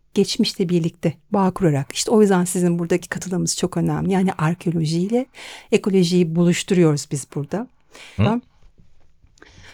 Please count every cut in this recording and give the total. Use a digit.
1